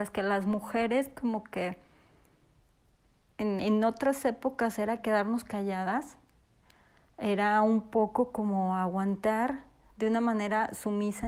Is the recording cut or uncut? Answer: cut